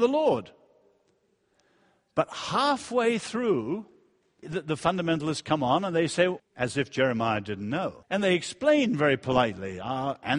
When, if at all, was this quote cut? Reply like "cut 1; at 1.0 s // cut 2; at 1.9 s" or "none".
cut 1; at 4.4 s // cut 2; at 6.4 s // cut 3; at 8.0 s